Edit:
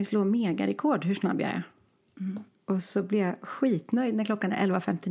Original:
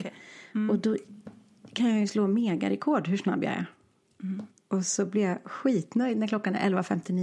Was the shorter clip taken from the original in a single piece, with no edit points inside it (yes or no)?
yes